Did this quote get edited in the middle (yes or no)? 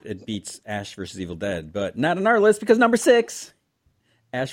no